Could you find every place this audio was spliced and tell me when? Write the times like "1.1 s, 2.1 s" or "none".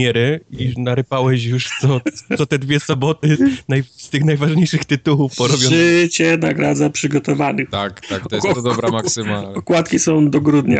8.5 s